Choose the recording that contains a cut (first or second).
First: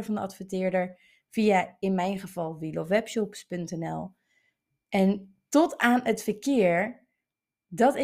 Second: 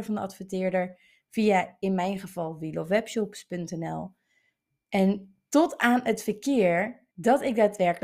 second